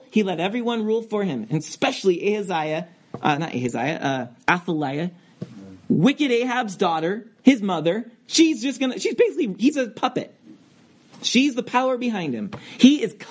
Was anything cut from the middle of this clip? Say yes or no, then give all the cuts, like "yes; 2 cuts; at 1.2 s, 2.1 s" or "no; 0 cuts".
no; 0 cuts